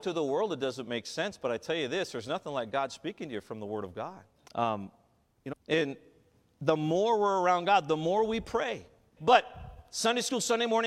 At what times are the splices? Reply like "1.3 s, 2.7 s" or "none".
4.5 s, 5.5 s, 9.2 s

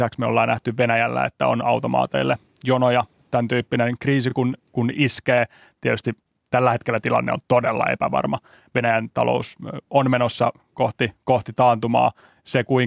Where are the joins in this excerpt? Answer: none

